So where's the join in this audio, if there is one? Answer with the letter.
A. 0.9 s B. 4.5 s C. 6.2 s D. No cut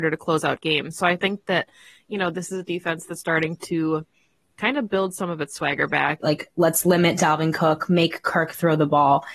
C